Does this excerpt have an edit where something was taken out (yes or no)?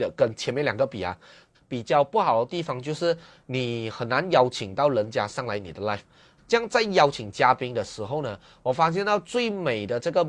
yes